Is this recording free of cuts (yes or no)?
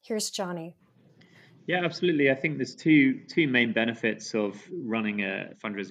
yes